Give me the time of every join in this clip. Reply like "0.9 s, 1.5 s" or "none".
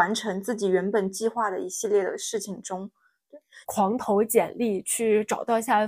3.6 s

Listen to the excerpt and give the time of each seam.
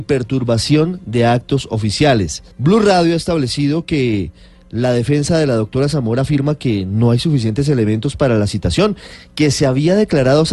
2.5 s

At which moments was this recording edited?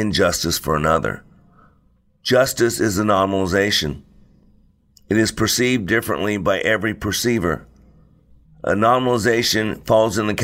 8.4 s

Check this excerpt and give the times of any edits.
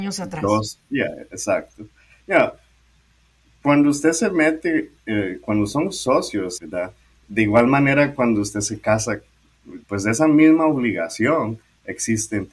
6.6 s, 9.8 s

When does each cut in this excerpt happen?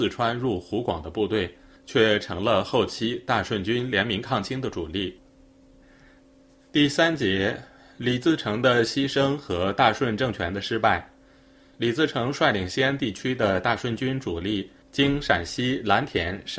11.7 s

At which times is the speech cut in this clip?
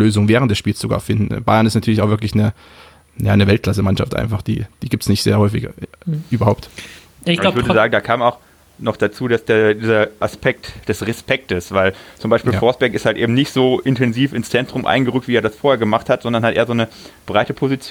none

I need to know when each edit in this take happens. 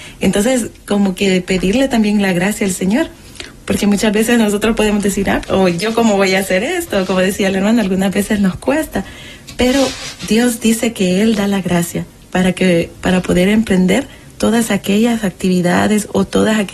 5.4 s

